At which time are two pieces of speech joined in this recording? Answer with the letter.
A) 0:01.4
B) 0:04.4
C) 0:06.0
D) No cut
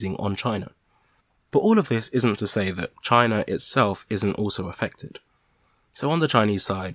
D